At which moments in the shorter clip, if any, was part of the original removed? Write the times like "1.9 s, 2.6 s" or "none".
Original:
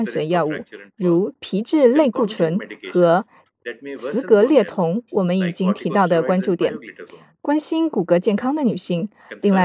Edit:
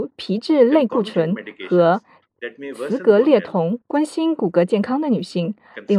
3.8 s

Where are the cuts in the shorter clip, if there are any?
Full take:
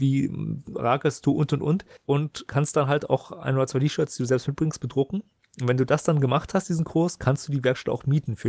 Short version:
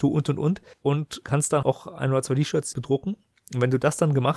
1.6 s, 2.7 s

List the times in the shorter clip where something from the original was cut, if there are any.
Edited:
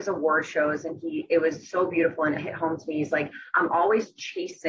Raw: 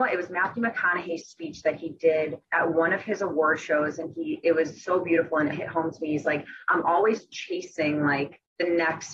none

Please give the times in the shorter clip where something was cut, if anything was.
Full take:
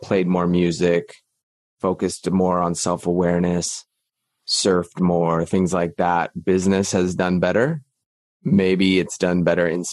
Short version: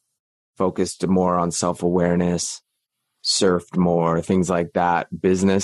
none

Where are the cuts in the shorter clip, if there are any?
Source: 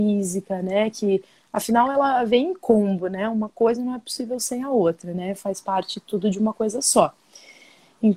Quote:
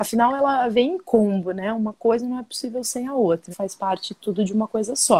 3.5 s

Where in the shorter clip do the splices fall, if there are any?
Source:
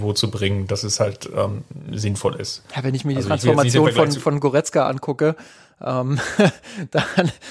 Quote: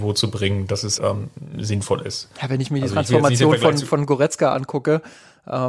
1.0 s

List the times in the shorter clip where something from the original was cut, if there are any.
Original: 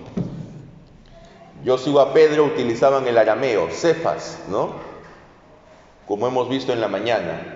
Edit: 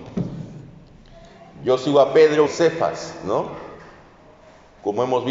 2.5 s

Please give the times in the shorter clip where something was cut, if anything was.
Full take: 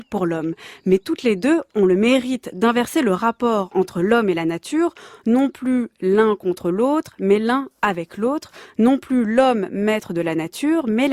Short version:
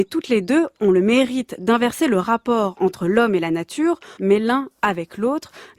4.2 s

